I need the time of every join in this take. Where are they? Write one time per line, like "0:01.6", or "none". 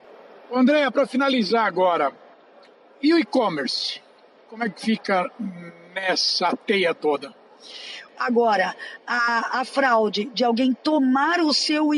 0:08.1